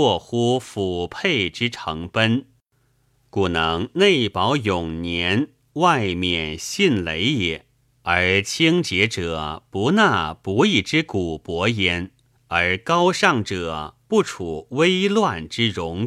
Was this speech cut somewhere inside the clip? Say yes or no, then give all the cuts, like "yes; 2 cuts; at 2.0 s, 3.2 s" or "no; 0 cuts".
yes; 2 cuts; at 7.9 s, 12.3 s